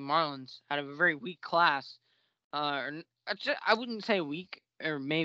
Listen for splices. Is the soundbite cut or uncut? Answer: uncut